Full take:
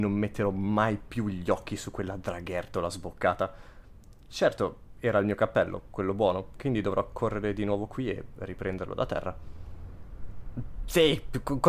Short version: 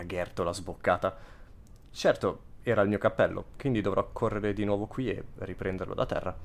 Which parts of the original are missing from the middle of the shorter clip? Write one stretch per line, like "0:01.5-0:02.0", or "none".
0:05.9-0:06.5